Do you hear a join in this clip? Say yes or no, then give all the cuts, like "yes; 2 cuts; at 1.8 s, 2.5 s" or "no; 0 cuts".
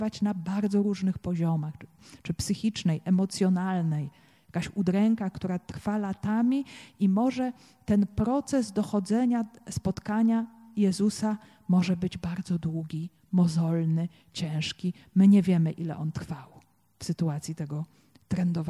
no; 0 cuts